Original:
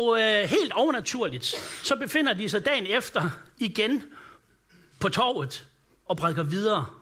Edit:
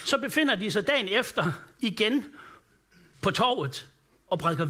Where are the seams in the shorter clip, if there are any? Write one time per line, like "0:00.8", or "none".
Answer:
none